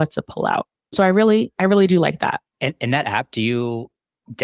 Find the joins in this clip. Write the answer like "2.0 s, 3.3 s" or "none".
0.9 s

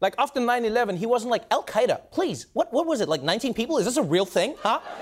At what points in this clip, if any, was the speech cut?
none

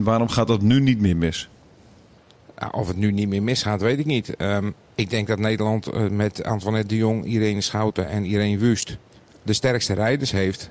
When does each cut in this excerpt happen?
none

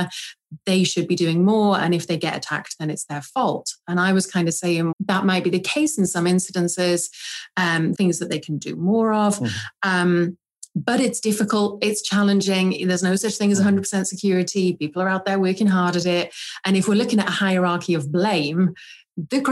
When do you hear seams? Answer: 4.9 s, 7.9 s

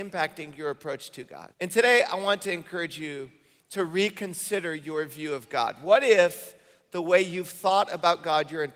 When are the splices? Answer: 1.5 s

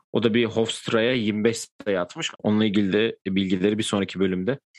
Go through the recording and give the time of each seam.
2.3 s

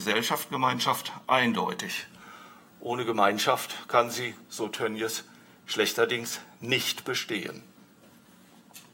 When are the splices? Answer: none

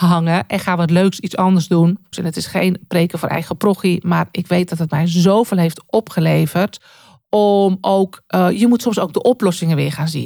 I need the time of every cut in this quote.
2.1 s

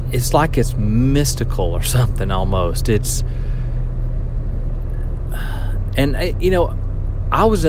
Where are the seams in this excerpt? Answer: none

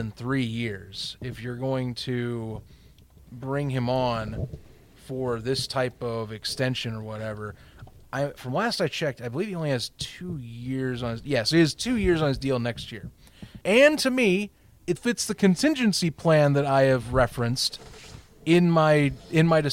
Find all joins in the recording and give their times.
13.6 s, 15.0 s

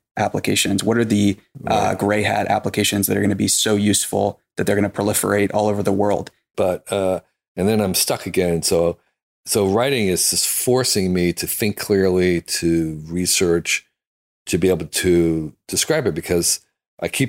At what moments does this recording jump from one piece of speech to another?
6.5 s

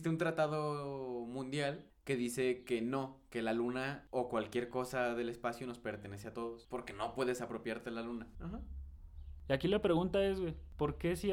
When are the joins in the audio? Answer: 8.3 s

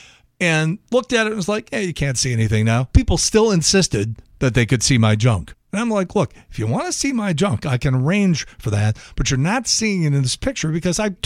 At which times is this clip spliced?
2.9 s

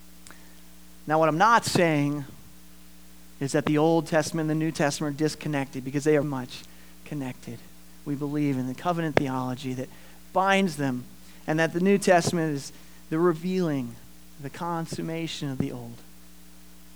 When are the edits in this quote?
6.2 s

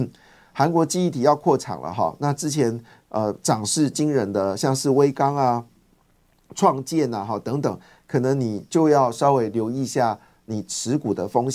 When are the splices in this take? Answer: none

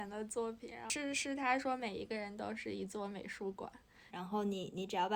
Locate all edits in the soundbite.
4.1 s

